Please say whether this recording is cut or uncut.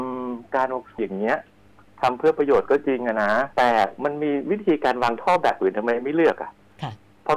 cut